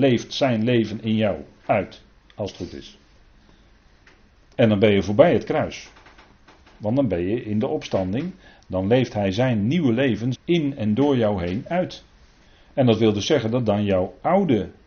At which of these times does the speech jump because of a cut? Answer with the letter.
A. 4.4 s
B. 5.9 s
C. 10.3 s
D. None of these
C